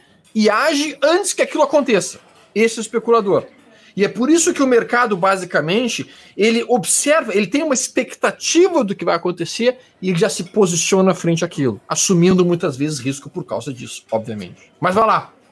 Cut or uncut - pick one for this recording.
uncut